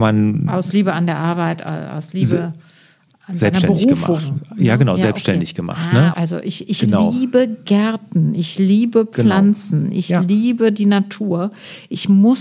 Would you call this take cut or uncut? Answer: cut